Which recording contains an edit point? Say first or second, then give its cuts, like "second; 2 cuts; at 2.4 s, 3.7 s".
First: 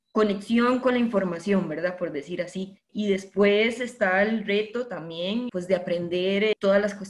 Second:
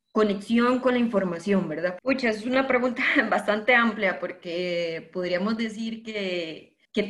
second; 1 cut; at 2.0 s